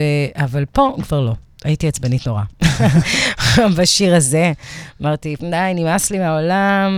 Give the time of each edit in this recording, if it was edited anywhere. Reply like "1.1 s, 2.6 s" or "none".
5.4 s